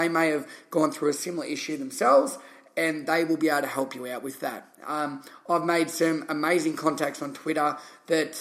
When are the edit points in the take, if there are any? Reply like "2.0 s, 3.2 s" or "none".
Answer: none